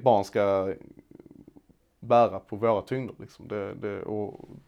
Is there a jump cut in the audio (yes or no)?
no